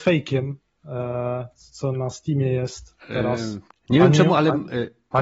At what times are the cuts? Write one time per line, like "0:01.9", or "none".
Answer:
0:03.7